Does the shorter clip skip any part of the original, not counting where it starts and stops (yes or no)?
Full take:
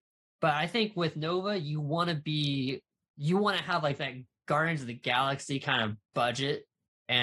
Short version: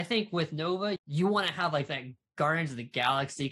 yes